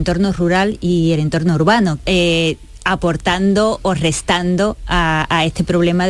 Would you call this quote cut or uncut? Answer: cut